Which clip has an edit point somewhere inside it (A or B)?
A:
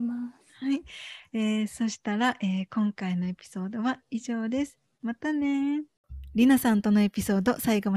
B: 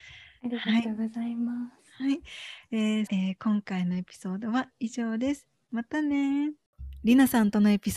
B